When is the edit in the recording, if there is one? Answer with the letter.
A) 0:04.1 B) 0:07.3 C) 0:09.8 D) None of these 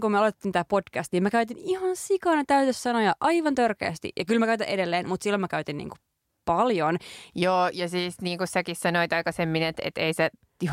B